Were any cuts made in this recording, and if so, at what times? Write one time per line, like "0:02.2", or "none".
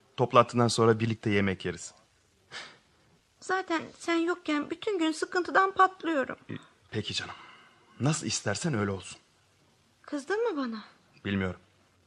0:03.2
0:06.9

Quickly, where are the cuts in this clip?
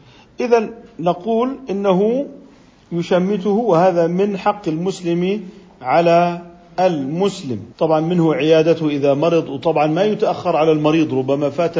0:07.7

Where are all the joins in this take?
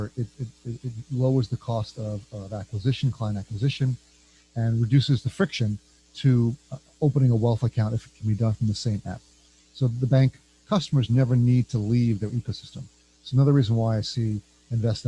none

